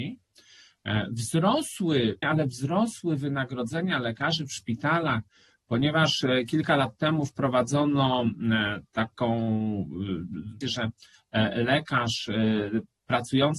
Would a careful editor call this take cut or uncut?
cut